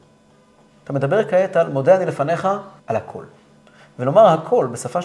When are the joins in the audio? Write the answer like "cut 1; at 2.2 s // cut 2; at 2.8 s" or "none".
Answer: cut 1; at 2.8 s